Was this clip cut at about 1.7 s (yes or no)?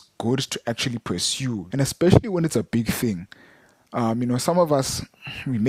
yes